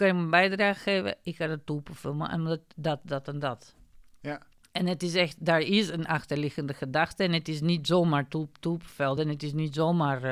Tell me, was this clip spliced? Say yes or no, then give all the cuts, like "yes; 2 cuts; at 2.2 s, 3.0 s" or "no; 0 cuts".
no; 0 cuts